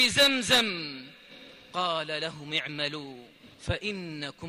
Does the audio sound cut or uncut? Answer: cut